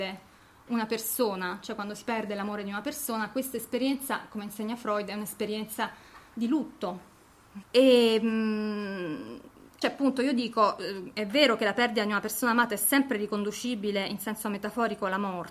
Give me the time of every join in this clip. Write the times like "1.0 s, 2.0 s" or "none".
7.6 s, 9.8 s